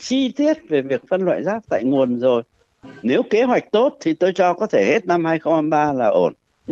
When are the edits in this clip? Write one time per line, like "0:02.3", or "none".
0:03.0